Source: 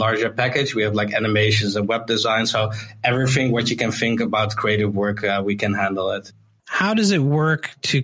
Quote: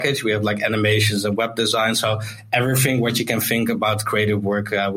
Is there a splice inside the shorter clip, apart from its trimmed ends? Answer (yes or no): no